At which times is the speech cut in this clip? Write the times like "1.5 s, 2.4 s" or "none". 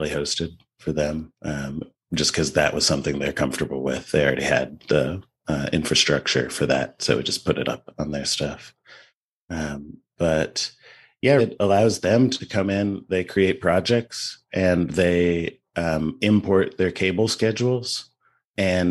11.4 s

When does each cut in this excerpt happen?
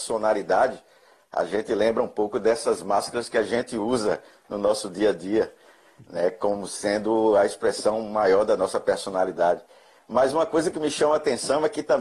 none

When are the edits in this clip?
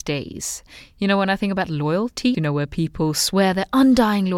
2.3 s

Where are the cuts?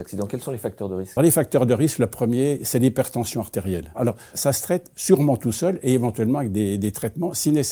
1.2 s

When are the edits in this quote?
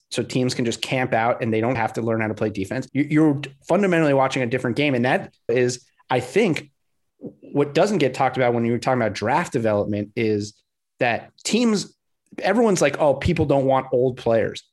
1.7 s, 2.9 s, 5.5 s

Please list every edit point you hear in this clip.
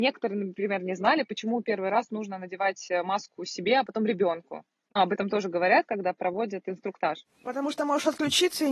none

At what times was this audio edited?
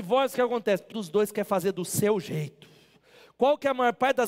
0.9 s

